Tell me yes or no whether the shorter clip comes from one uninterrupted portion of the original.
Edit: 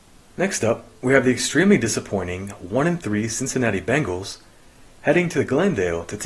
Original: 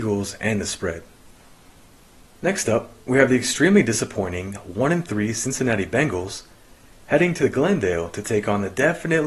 yes